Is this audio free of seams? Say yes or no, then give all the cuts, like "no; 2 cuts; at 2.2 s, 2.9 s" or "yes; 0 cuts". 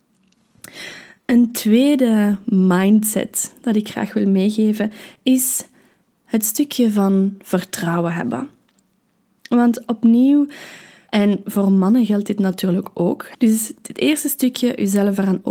no; 2 cuts; at 11.1 s, 13.3 s